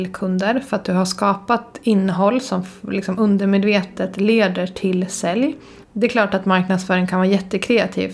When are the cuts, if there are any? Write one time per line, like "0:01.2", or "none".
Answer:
0:05.8